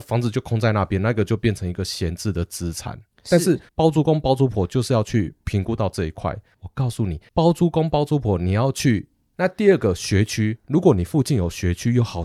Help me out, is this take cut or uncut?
cut